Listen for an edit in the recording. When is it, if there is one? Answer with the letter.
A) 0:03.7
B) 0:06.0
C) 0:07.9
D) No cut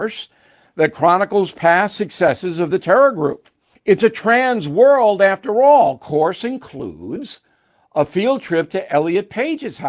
A